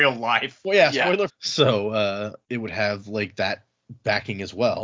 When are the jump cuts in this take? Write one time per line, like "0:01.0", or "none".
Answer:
0:01.3
0:02.4

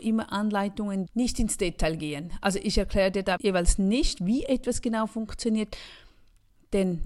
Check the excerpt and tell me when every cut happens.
0:01.1
0:03.4

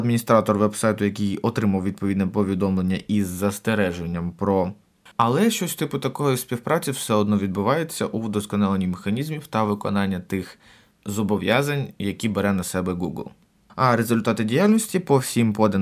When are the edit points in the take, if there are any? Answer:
0:05.1
0:13.7

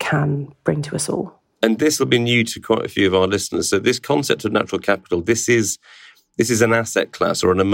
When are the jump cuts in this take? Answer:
none

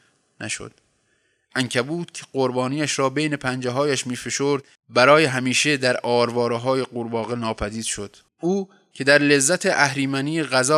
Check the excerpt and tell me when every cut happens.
0:08.3

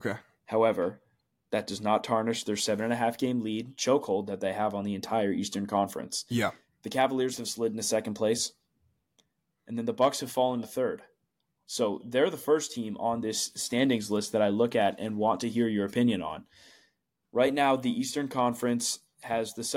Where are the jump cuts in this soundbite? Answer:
0:17.2

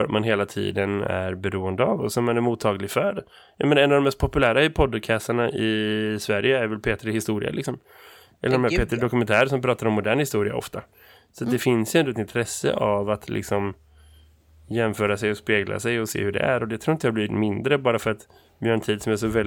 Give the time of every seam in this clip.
none

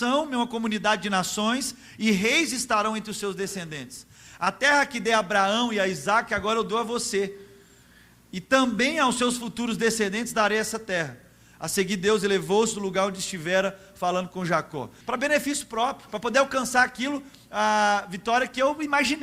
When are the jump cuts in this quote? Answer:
0:15.0

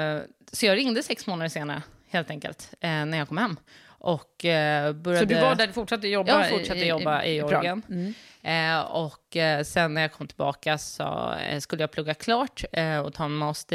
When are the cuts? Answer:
none

